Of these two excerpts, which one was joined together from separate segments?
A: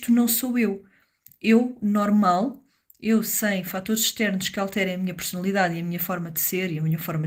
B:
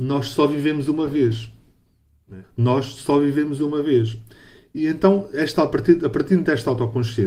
B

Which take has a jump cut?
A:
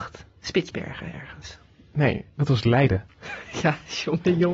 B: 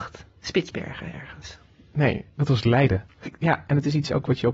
B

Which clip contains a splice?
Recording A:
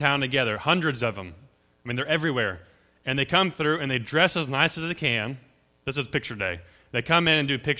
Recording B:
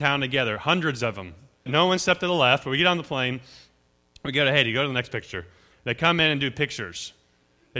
B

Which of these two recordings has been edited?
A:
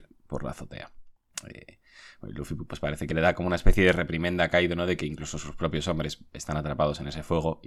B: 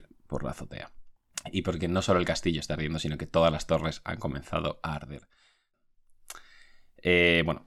B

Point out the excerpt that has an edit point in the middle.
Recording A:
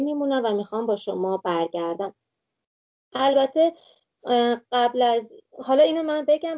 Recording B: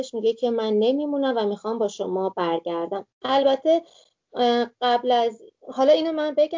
B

